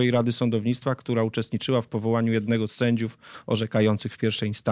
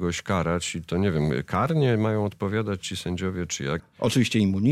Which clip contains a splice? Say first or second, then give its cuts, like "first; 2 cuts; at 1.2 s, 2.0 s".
second; 1 cut; at 3.8 s